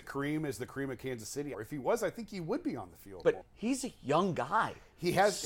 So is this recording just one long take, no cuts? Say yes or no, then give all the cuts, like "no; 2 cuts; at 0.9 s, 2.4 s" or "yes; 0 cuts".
no; 2 cuts; at 1.5 s, 3.4 s